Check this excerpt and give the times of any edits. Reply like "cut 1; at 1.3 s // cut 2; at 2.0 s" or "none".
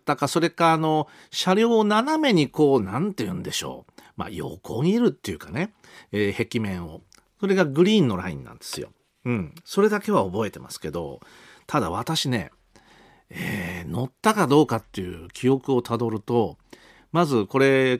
none